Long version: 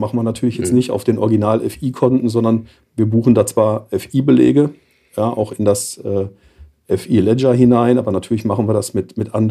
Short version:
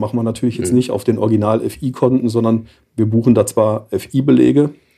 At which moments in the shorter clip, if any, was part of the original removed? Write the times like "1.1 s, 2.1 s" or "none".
none